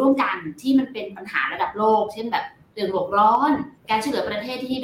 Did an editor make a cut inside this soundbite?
yes; 1 cut; at 3.8 s

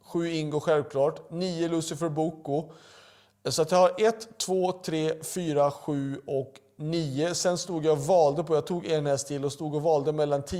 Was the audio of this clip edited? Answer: no; 0 cuts

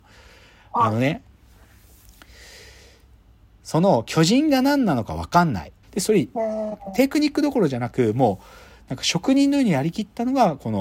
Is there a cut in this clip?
yes; 1 cut; at 5.8 s

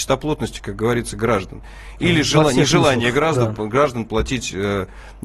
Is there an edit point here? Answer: no; 0 cuts

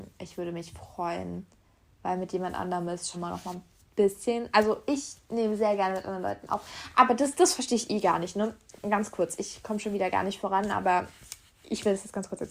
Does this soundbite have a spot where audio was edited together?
yes; 1 cut; at 3.1 s

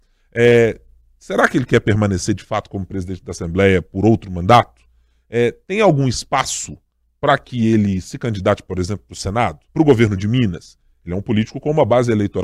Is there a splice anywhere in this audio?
yes; 1 cut; at 9.7 s

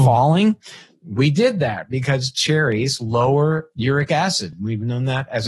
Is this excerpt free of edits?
yes; 0 cuts

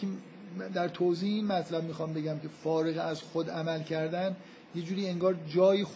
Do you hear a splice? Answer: no; 0 cuts

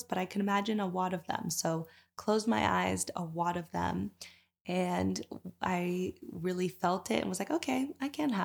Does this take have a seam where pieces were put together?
yes; 1 cut; at 3.1 s

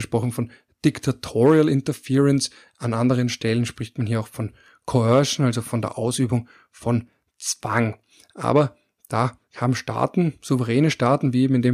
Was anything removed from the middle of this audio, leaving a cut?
no; 0 cuts

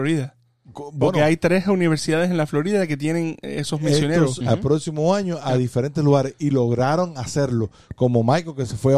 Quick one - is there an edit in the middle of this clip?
yes; 1 cut; at 4.4 s

